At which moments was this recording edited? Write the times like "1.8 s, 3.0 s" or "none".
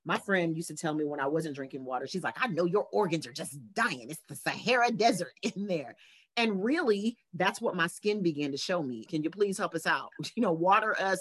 9.1 s